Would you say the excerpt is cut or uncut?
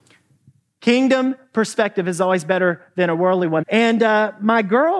cut